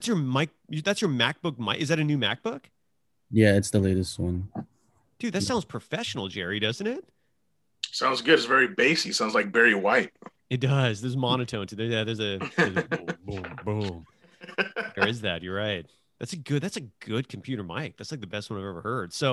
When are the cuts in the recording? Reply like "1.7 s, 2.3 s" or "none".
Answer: none